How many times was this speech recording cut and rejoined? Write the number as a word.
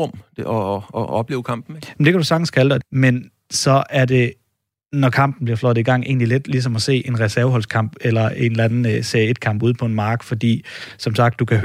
one